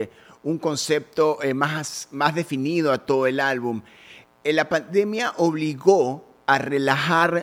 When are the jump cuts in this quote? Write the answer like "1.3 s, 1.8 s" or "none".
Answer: none